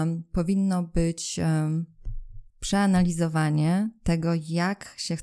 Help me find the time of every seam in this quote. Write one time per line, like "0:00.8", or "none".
0:02.5